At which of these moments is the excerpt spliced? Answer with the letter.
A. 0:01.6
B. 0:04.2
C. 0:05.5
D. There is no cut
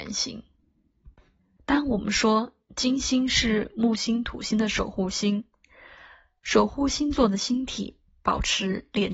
A